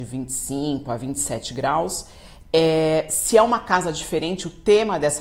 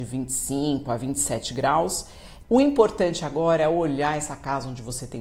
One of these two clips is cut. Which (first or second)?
second